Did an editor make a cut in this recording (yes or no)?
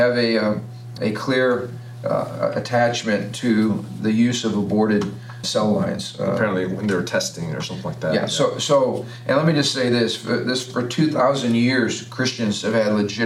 yes